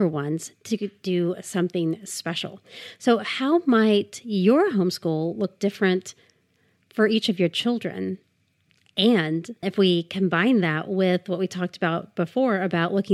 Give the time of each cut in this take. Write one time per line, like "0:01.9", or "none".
0:09.6